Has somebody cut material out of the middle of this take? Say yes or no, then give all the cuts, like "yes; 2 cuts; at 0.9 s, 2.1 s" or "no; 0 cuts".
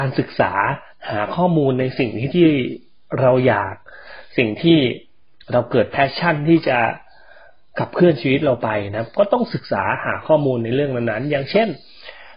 yes; 1 cut; at 2.3 s